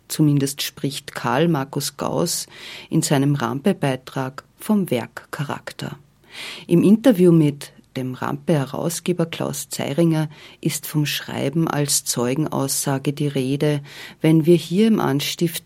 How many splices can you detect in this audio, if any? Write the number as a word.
zero